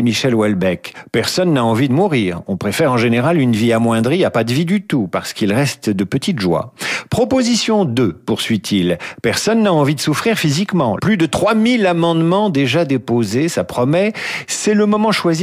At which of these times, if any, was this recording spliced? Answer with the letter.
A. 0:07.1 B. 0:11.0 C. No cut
B